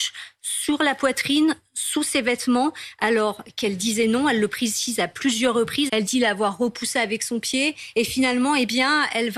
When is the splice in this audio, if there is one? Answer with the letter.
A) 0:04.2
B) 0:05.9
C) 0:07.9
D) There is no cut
B